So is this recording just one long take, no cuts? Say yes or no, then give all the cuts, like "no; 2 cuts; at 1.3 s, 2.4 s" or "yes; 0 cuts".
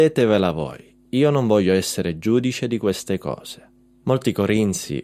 no; 1 cut; at 4.0 s